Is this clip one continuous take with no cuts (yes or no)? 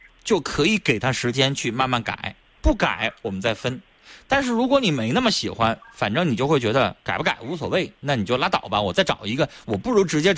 yes